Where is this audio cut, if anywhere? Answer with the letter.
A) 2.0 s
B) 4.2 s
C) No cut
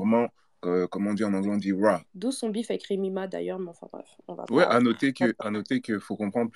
A